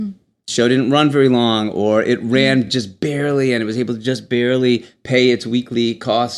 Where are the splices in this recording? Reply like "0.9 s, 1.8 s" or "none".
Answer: none